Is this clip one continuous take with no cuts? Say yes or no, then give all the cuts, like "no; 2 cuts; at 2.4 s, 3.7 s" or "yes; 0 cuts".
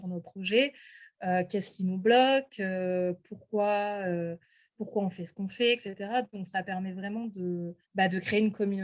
no; 1 cut; at 7.8 s